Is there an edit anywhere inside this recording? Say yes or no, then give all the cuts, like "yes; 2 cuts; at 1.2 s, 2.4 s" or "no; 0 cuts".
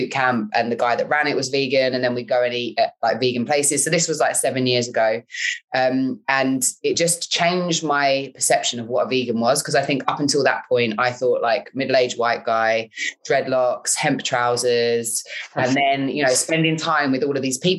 no; 0 cuts